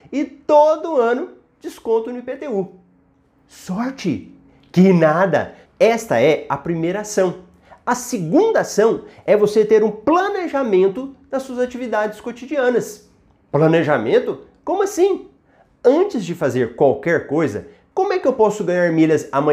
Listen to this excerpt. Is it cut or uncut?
cut